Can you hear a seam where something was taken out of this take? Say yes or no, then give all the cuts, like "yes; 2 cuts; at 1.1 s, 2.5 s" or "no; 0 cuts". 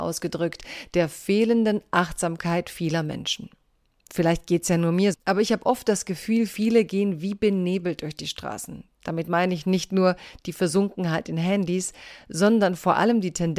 yes; 1 cut; at 5.1 s